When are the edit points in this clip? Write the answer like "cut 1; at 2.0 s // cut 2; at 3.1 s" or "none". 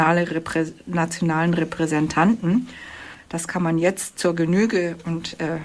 cut 1; at 3.1 s